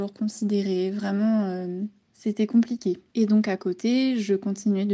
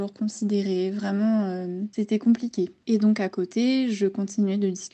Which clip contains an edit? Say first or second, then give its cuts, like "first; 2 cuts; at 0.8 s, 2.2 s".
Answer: second; 1 cut; at 1.9 s